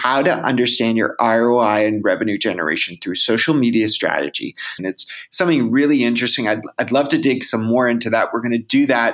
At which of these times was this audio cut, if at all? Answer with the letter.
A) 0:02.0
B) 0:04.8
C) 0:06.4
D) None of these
B